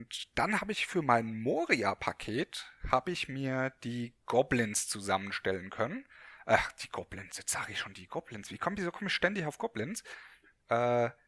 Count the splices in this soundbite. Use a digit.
0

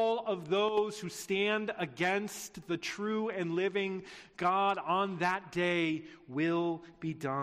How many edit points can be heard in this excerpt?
0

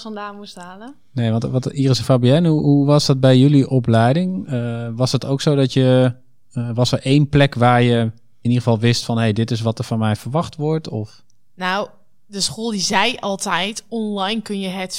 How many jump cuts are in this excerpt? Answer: 0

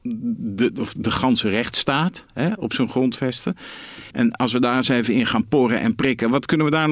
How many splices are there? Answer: 2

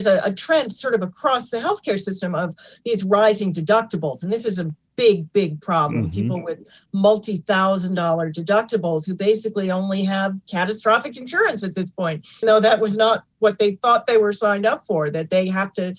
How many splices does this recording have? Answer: 1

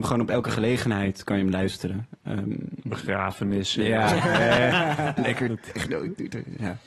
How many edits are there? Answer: 0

